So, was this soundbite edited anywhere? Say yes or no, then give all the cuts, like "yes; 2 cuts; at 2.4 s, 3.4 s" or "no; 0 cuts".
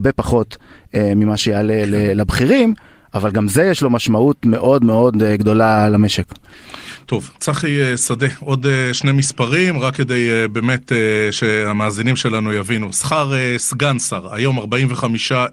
no; 0 cuts